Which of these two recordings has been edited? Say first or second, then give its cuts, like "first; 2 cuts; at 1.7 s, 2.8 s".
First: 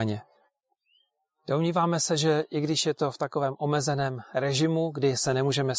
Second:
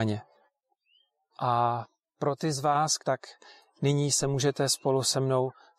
second; 2 cuts; at 1.3 s, 3.0 s